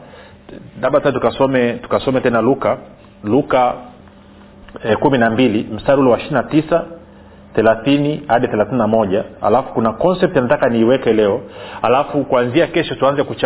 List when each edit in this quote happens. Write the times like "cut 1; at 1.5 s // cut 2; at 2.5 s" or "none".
none